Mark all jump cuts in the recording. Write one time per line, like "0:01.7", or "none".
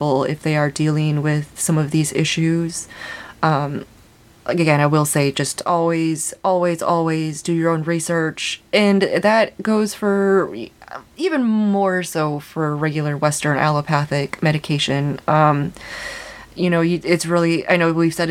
none